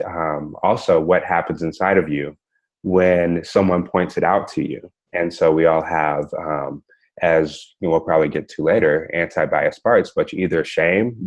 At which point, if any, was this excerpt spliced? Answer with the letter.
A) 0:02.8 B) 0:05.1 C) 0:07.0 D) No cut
B